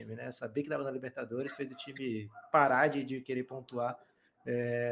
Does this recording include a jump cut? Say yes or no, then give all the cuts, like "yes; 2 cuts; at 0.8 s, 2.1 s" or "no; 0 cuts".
no; 0 cuts